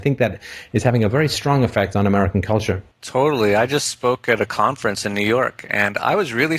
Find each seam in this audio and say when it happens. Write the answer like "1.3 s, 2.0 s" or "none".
2.9 s